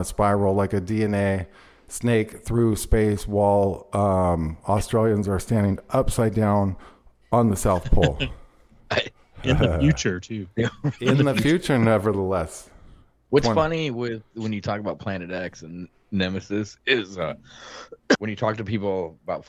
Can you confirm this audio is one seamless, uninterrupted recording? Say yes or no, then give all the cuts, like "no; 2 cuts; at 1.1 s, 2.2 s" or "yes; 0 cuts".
no; 1 cut; at 18.1 s